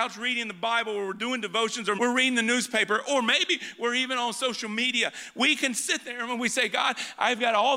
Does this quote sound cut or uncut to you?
cut